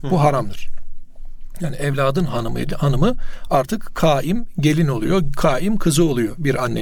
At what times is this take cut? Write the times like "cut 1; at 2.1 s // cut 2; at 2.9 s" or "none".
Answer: none